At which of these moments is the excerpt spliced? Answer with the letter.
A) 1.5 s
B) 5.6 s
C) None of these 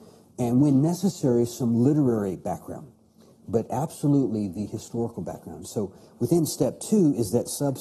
C